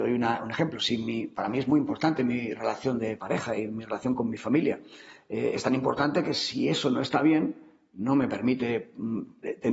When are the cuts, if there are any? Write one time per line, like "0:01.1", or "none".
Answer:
none

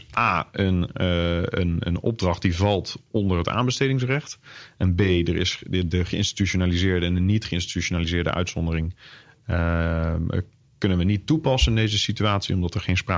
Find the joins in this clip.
none

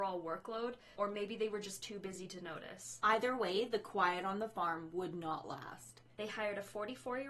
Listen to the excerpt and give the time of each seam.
0:01.0
0:06.1

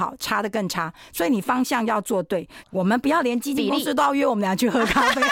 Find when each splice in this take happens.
0:02.6

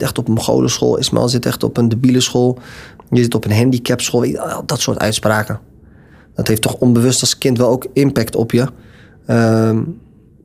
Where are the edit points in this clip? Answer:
none

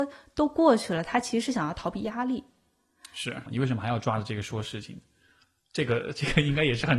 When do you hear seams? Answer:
0:03.5

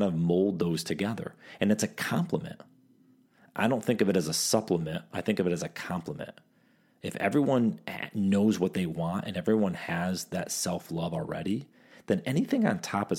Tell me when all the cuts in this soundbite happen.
none

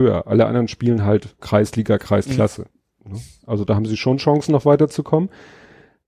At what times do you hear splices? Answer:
0:01.4

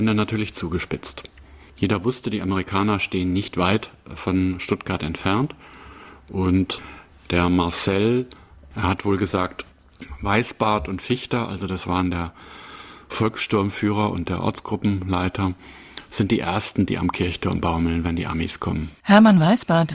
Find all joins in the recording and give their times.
none

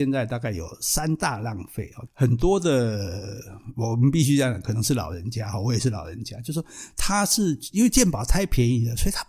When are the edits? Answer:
0:02.1

